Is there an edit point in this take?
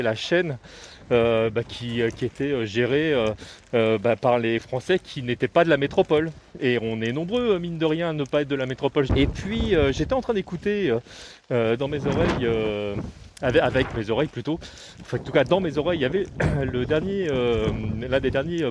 yes; 1 cut; at 9.1 s

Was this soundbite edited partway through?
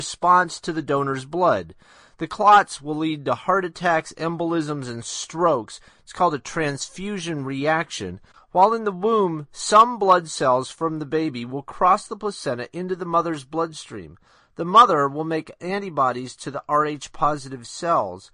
yes; 1 cut; at 8.3 s

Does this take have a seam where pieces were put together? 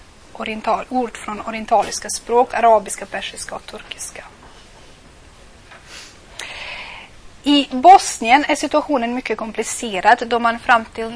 no; 0 cuts

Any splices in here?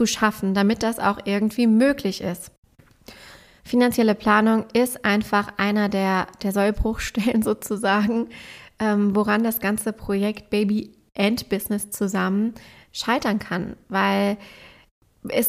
yes; 1 cut; at 3.6 s

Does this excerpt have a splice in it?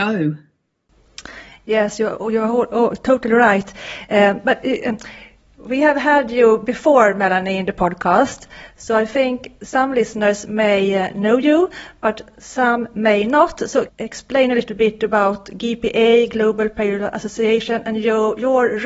yes; 1 cut; at 13.9 s

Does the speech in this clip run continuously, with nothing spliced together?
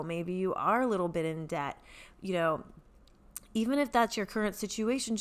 yes; 0 cuts

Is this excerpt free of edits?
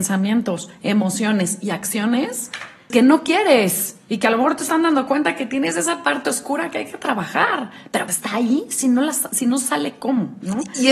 no; 2 cuts; at 2.9 s, 8.1 s

